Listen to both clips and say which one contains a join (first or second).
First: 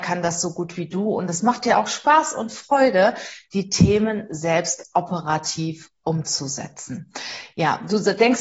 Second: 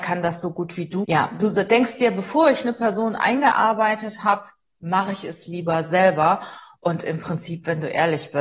second